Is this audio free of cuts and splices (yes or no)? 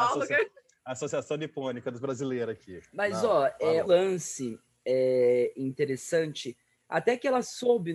no